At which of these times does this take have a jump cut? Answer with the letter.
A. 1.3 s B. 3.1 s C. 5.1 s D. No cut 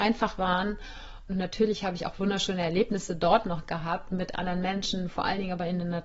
A